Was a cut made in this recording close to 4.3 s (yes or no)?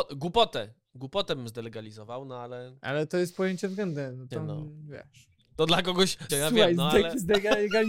yes